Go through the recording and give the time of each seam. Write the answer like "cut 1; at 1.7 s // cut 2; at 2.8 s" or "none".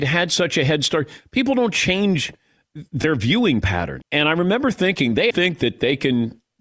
cut 1; at 4.0 s // cut 2; at 5.3 s